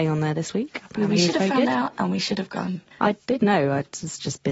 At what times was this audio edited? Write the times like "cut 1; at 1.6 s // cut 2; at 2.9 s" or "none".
cut 1; at 2.9 s